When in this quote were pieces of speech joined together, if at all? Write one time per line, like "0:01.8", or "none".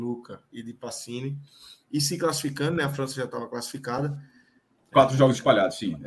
0:04.8